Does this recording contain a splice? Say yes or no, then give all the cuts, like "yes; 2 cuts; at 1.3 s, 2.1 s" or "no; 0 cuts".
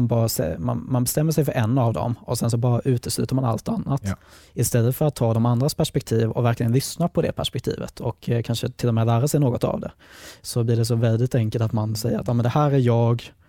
no; 0 cuts